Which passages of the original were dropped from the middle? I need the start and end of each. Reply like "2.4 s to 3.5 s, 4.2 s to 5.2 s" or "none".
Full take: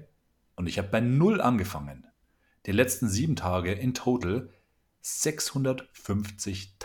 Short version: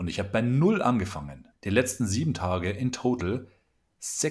2.1 s to 2.6 s